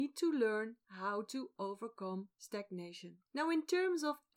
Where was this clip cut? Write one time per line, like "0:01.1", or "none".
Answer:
0:03.3